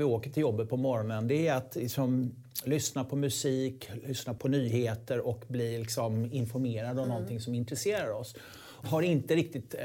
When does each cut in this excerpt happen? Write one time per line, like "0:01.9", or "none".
0:08.8